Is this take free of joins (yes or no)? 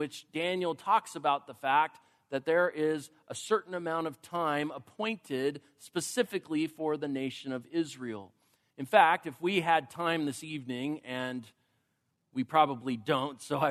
no